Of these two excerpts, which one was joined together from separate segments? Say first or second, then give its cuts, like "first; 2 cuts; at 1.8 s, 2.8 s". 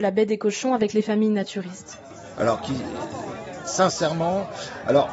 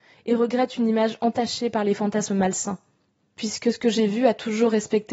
first; 1 cut; at 2.3 s